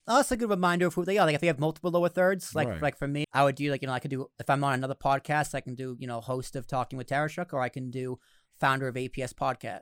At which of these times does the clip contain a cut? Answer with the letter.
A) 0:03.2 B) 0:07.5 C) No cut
A